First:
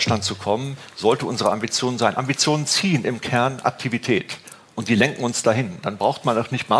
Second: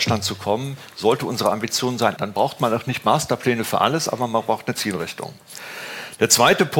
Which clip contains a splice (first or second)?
second